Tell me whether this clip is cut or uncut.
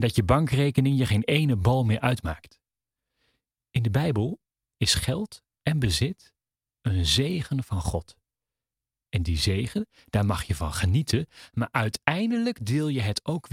uncut